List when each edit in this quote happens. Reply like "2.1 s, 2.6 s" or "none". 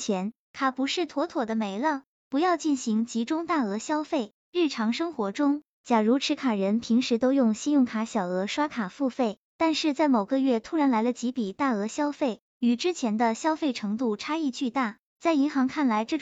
none